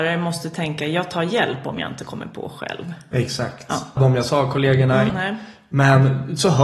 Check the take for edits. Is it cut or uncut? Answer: cut